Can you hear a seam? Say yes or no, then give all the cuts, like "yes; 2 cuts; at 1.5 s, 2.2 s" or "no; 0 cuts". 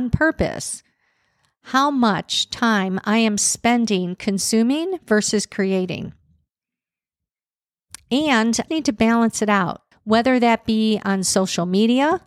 yes; 2 cuts; at 8.7 s, 9.9 s